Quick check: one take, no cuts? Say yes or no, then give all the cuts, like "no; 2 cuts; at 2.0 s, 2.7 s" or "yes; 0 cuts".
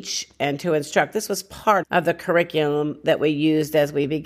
no; 1 cut; at 1.8 s